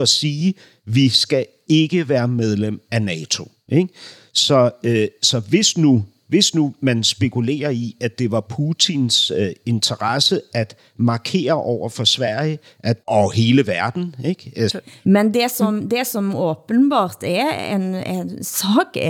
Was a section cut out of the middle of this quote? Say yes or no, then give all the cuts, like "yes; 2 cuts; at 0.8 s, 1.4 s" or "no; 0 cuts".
yes; 2 cuts; at 13.0 s, 14.7 s